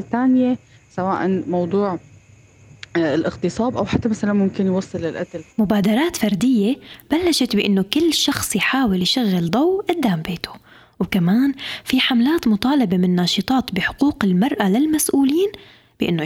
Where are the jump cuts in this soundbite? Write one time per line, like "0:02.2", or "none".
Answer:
0:05.5